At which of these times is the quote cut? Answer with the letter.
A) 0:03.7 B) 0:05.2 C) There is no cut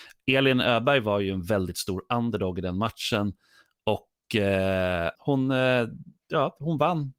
B